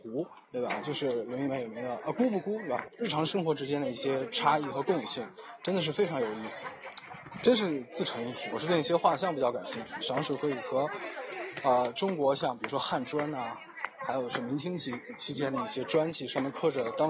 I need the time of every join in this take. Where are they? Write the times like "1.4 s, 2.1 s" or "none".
2.8 s, 8.5 s, 10.0 s